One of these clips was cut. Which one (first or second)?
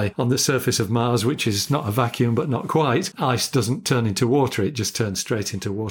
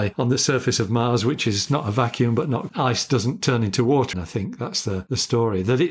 second